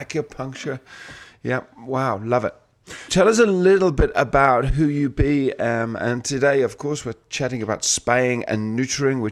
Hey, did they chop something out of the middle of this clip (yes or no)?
yes